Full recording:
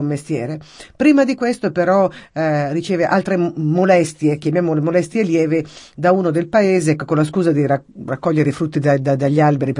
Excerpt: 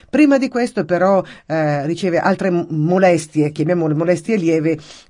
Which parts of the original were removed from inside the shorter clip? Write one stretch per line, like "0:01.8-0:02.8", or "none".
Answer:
none